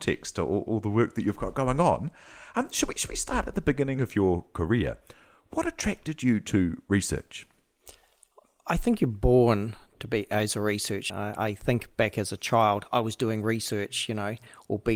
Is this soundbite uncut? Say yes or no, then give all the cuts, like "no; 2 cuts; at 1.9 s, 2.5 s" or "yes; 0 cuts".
no; 1 cut; at 11.1 s